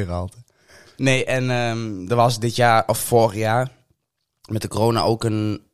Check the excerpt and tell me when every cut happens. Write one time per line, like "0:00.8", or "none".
none

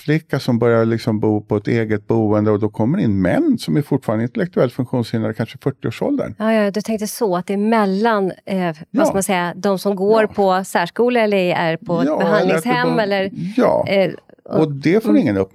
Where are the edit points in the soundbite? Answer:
none

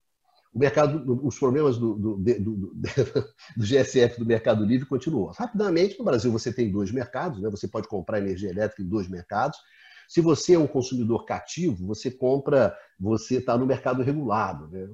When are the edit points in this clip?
none

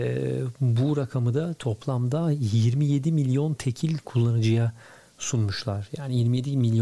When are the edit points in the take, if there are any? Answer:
none

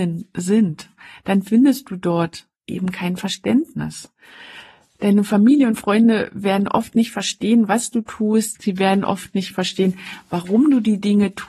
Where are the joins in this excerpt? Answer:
none

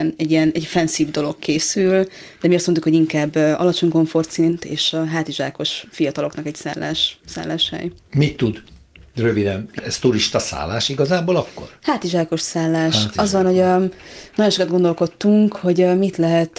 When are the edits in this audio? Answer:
0:09.8

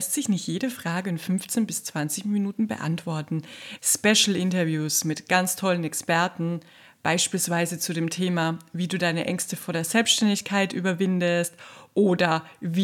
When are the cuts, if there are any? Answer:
0:03.8

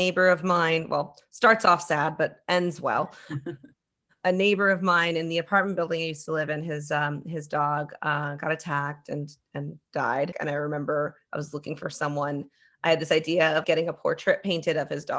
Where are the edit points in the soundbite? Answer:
0:10.3
0:13.6

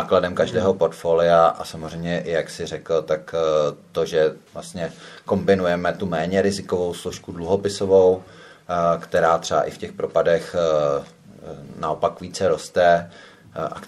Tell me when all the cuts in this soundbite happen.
0:04.5

